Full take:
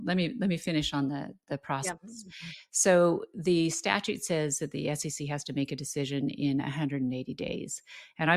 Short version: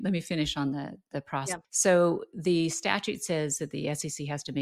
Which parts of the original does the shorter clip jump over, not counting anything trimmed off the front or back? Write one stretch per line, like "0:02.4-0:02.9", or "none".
0:02.0-0:02.7

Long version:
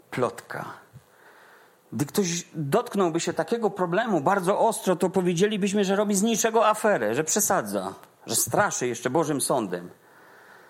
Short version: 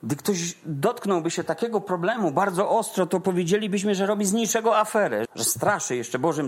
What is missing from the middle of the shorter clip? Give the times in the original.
0:07.1-0:08.2

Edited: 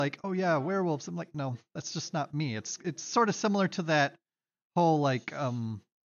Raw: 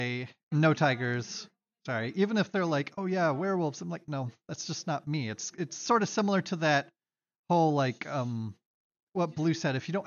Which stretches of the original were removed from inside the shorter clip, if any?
none

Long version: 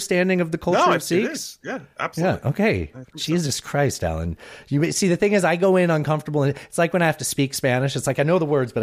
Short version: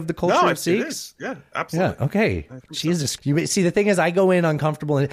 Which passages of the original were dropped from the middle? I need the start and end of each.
0:03.6-0:04.6

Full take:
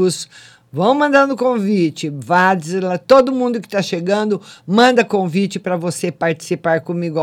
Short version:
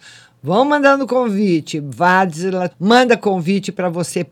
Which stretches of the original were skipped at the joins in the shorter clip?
0:03.0-0:04.6

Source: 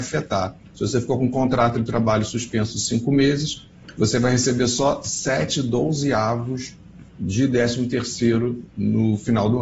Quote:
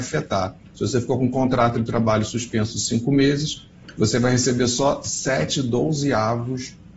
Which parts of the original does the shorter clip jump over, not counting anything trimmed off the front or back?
none

